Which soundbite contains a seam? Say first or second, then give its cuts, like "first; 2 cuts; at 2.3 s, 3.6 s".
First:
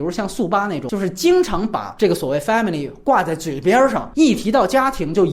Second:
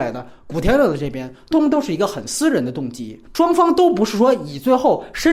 second; 2 cuts; at 1.5 s, 3.3 s